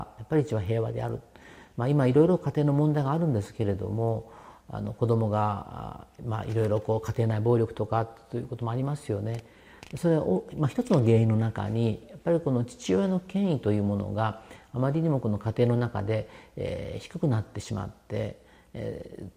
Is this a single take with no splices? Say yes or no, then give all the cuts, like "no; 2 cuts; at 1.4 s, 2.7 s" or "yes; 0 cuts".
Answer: yes; 0 cuts